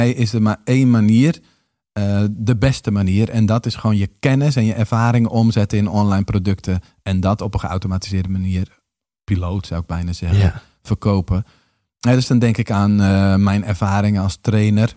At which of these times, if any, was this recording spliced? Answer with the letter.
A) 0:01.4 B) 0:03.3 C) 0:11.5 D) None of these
D